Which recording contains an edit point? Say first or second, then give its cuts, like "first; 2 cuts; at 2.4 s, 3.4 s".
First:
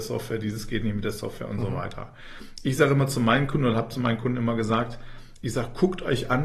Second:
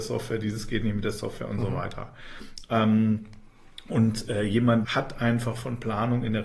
second; 2 cuts; at 2.6 s, 4.8 s